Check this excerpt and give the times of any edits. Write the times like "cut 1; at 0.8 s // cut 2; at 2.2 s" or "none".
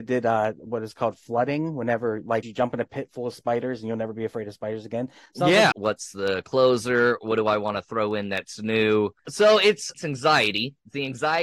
cut 1; at 2.4 s // cut 2; at 5.7 s // cut 3; at 9.2 s